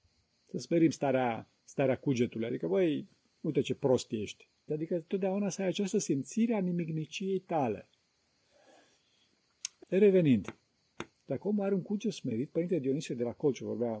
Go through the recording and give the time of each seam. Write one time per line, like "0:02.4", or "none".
0:04.7
0:09.8
0:11.1